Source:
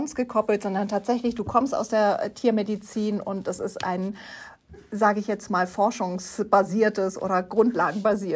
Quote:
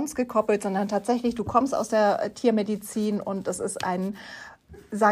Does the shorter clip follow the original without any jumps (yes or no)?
yes